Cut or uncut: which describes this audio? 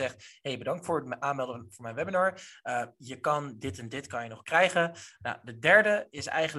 cut